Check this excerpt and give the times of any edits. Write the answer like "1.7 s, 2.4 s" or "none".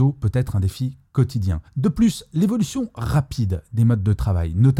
1.7 s